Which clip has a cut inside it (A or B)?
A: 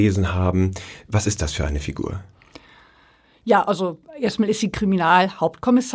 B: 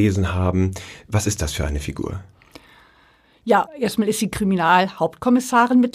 B